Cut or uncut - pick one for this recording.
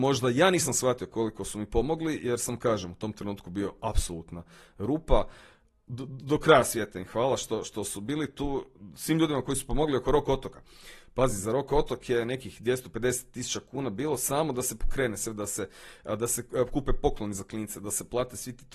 uncut